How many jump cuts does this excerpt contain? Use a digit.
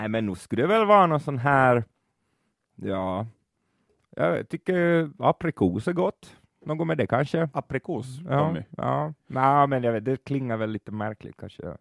0